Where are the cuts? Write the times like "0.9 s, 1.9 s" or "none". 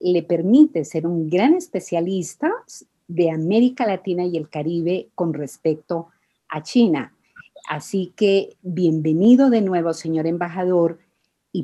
none

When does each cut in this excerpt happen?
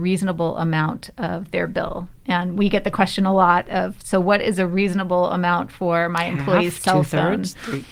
none

